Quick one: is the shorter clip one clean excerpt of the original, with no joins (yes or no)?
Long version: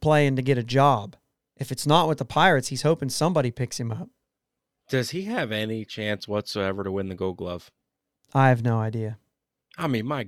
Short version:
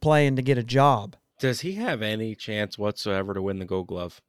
no